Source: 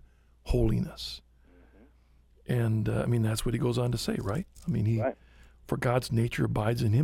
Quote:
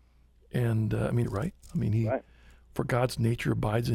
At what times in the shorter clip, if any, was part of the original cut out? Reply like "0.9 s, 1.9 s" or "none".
1.2 s

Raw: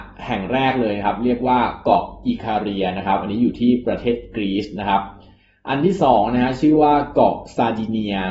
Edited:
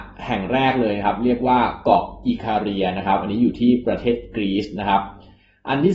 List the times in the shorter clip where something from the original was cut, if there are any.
none

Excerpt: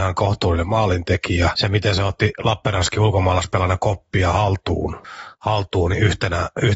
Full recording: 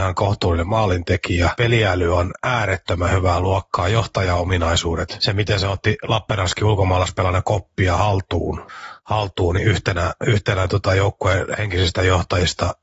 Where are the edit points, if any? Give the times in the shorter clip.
1.5 s

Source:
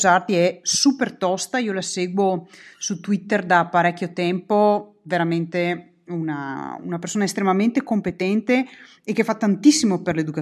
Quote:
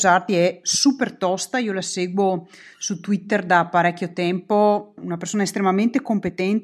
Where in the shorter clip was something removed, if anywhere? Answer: 5.0 s

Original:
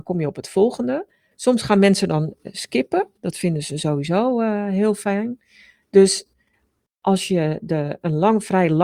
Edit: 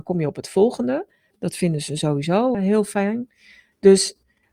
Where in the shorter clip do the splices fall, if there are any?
1.3 s, 2.5 s

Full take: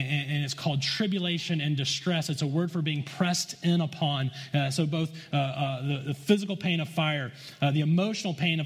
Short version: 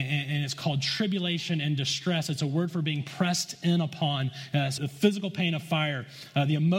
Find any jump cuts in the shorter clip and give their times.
4.8 s

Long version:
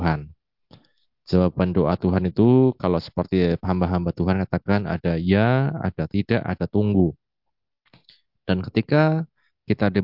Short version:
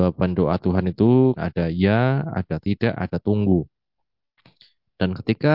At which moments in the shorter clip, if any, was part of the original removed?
1.4 s

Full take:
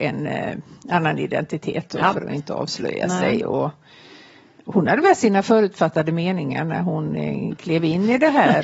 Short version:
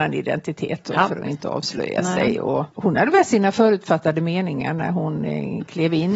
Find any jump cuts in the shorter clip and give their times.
2.7 s

